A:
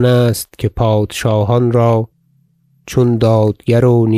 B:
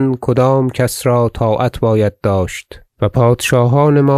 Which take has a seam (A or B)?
B